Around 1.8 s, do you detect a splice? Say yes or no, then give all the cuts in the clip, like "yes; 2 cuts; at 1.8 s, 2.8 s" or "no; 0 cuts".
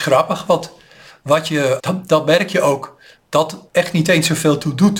yes; 2 cuts; at 1.8 s, 3.7 s